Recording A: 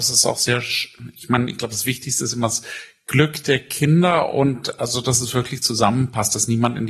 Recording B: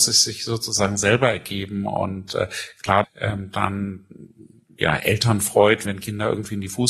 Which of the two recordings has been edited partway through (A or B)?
B